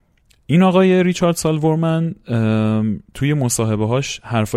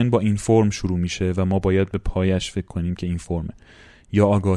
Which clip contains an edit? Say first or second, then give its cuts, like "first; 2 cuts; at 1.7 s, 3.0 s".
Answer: first; 1 cut; at 3.1 s